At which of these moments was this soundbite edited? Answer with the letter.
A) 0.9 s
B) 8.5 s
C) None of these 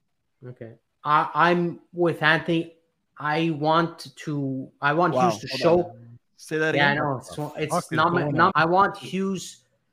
B